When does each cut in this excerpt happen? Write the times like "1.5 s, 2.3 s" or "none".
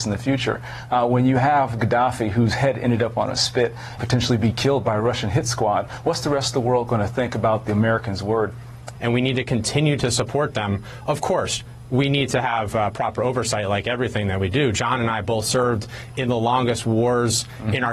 4.0 s, 9.0 s